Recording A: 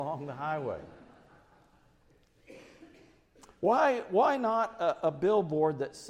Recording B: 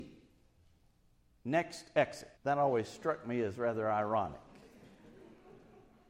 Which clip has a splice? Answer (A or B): B